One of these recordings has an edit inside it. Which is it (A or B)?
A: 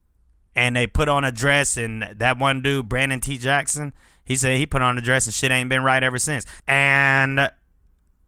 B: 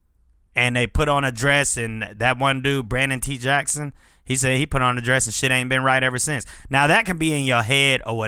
A